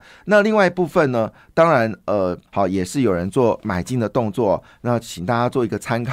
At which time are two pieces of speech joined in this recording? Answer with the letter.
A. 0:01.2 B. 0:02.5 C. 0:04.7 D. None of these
B